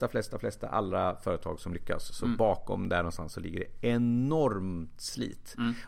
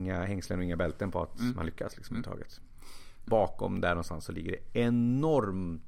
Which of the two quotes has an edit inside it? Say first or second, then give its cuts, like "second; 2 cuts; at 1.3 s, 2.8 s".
second; 1 cut; at 3.3 s